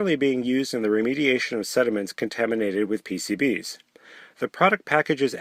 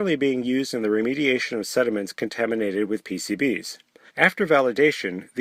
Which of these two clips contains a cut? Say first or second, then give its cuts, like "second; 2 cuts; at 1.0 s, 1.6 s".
second; 1 cut; at 4.1 s